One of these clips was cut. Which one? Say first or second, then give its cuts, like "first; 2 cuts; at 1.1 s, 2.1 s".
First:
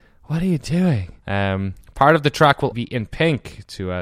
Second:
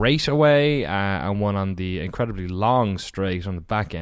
first; 2 cuts; at 1.2 s, 2.7 s